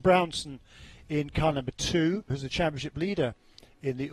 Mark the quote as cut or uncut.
cut